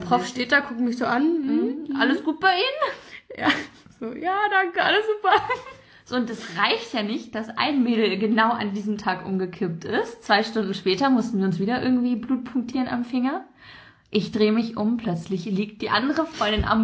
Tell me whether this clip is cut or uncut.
uncut